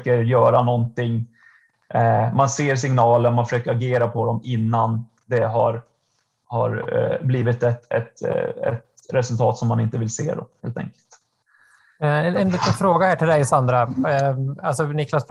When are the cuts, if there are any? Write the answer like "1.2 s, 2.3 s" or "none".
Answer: none